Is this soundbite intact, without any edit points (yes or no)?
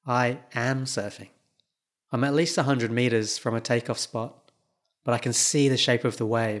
no